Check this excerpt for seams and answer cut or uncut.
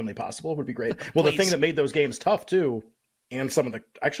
cut